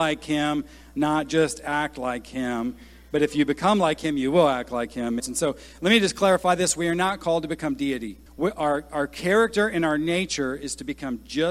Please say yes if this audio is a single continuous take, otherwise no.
no